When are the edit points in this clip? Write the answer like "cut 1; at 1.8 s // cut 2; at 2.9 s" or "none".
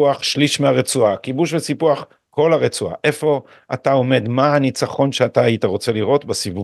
none